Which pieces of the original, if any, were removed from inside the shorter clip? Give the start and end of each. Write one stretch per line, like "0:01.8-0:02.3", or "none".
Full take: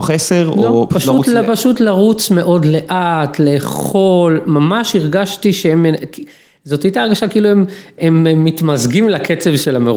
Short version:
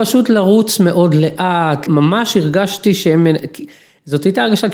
0:03.4-0:04.4